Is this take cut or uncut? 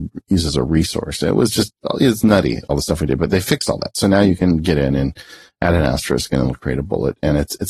uncut